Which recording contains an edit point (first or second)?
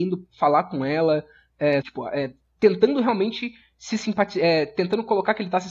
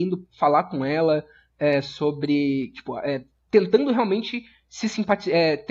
first